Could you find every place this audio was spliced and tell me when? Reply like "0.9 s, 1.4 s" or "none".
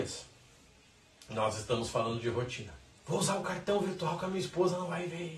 3.0 s